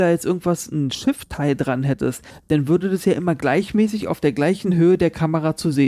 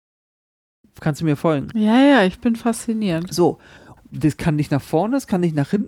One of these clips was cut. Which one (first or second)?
second